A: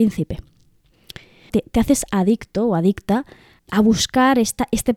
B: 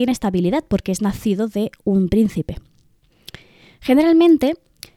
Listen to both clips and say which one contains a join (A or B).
A